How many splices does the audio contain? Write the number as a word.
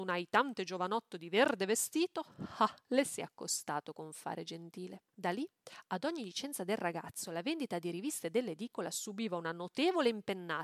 two